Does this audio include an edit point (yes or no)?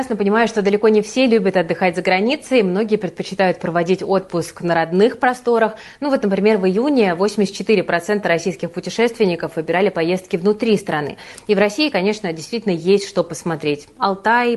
no